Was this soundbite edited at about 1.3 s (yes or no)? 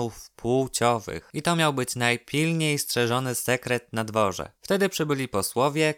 no